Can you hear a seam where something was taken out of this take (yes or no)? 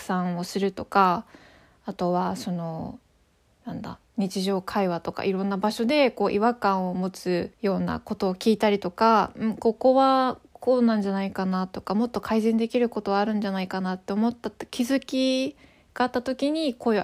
yes